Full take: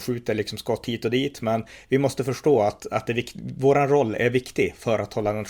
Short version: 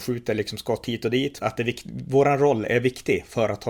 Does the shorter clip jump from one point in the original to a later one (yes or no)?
yes